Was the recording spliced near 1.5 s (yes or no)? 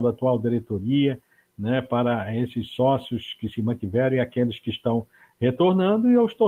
no